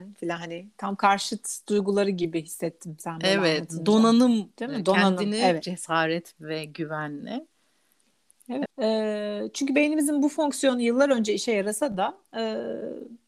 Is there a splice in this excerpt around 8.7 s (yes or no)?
yes